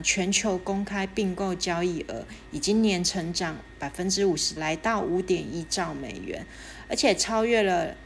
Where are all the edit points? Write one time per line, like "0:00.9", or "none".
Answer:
0:04.6